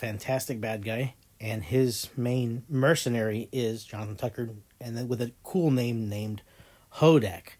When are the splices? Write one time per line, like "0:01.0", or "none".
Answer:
none

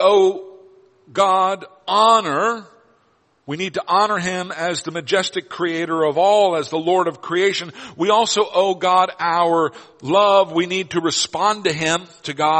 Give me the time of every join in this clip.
none

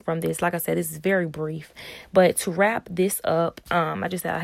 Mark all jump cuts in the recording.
none

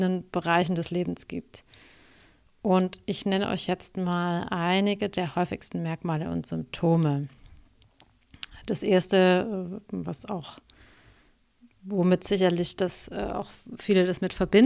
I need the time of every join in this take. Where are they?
none

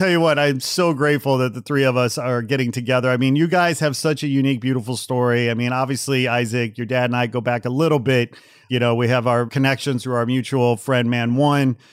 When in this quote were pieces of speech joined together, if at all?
none

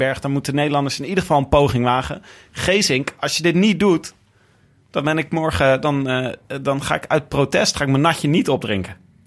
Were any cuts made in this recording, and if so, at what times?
none

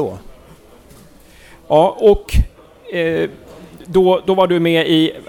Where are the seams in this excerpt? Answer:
none

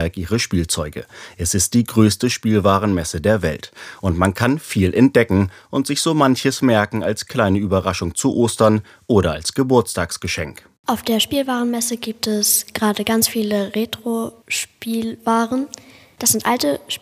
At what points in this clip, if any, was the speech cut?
none

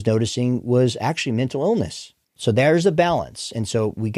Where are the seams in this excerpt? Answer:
0:02.4

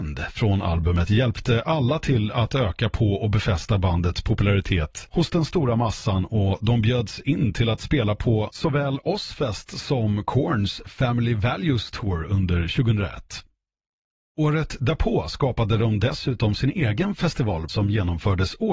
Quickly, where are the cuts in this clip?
0:17.7

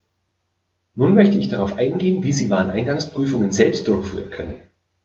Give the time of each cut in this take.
none

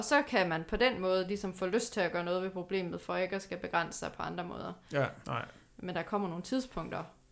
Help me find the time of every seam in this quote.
0:05.2

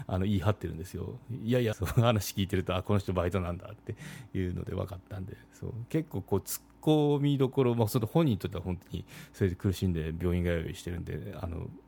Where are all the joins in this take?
0:01.7

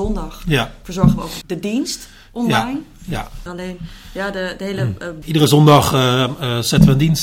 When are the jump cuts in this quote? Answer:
0:01.4
0:03.5
0:05.2

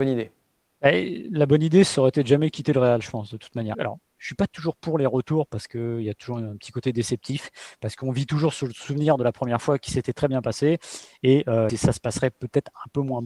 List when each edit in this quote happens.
0:03.7
0:11.7

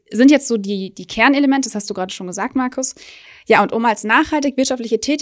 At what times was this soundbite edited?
none

